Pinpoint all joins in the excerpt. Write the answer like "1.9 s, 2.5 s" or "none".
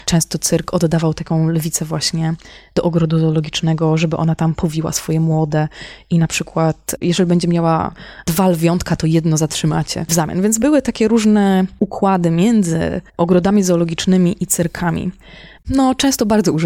13.1 s, 15.6 s